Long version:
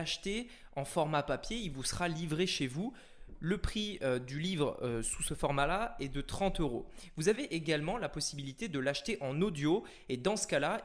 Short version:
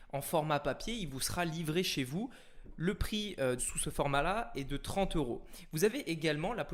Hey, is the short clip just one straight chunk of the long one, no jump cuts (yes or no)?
no